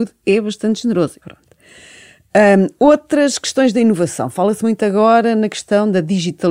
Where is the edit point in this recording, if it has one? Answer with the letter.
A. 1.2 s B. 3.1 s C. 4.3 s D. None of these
A